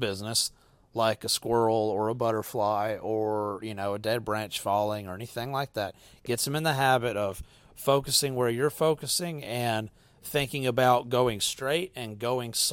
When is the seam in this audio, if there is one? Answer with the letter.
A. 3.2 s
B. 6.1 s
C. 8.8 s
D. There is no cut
D